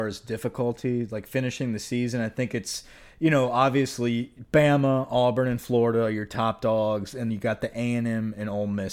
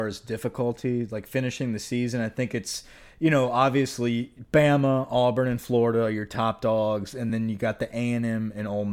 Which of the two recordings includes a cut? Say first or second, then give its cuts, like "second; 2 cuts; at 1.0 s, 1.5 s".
first; 1 cut; at 7.3 s